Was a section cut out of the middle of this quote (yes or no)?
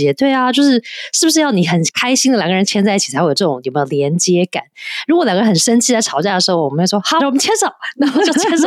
yes